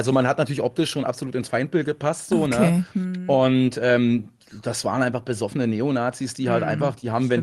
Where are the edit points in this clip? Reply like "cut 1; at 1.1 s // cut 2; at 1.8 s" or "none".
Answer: none